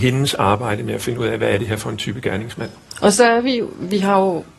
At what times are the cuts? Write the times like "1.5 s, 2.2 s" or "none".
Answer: none